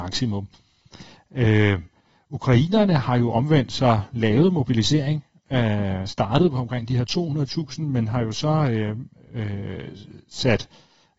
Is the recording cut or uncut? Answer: uncut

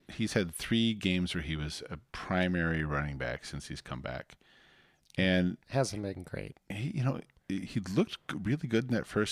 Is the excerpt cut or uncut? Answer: cut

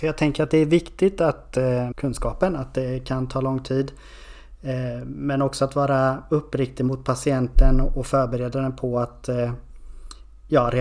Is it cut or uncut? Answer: cut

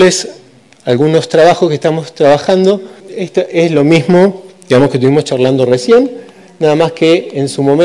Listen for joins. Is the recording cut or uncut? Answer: cut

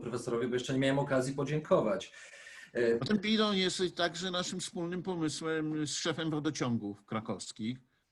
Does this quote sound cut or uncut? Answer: uncut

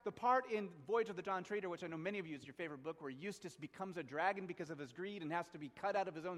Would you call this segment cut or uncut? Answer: uncut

